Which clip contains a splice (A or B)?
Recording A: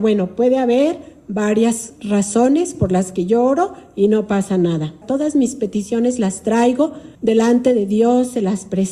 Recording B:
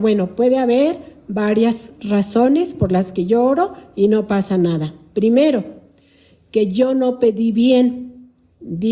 A